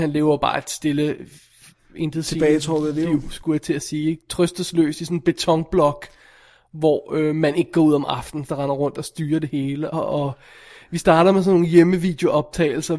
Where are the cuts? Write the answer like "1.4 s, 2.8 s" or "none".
8.5 s, 9.9 s